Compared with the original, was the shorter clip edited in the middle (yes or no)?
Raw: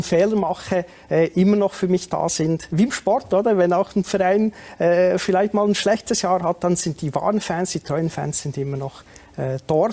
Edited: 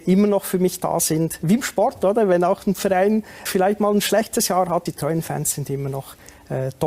yes